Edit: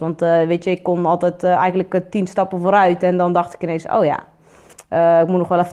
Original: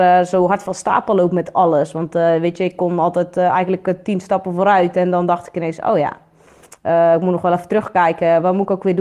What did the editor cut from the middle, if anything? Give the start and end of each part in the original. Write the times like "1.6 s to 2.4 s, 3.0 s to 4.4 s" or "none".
none